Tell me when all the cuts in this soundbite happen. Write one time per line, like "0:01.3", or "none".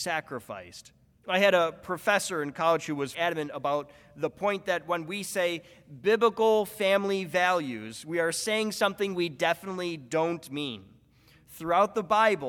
0:01.1
0:03.1